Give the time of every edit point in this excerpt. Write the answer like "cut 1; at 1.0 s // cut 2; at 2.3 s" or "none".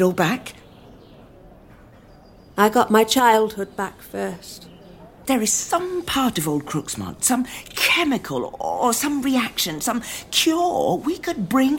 cut 1; at 5.2 s